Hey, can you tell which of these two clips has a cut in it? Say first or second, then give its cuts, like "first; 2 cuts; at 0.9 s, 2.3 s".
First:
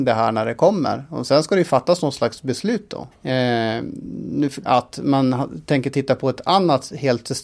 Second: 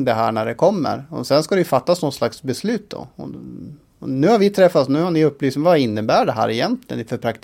first; 2 cuts; at 3.1 s, 4.7 s